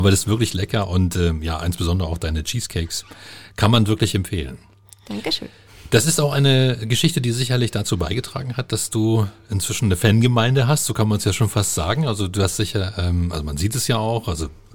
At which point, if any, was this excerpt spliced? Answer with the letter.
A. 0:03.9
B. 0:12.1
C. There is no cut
C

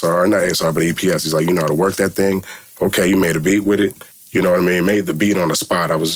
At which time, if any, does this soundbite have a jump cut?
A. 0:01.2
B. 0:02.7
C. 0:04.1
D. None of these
C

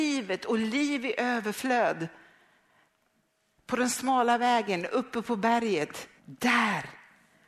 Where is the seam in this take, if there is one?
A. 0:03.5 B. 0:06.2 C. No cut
B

